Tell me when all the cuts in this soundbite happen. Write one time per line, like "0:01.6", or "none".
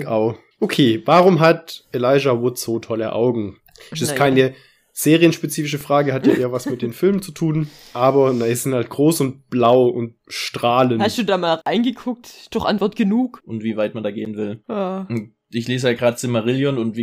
0:13.4